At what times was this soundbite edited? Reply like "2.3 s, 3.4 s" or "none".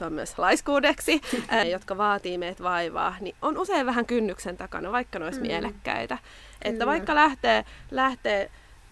1.6 s